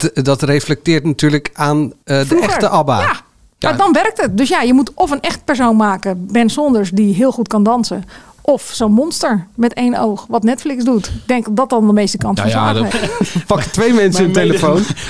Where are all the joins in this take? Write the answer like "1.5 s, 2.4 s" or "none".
12.9 s